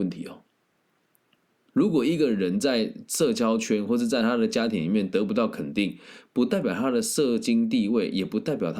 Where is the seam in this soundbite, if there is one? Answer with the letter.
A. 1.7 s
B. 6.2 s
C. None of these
C